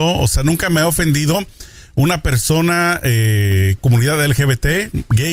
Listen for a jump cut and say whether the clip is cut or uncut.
cut